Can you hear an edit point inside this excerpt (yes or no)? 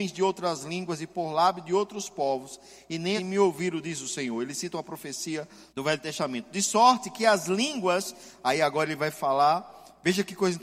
yes